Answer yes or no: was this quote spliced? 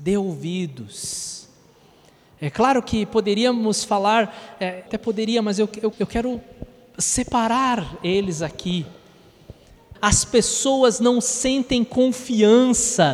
yes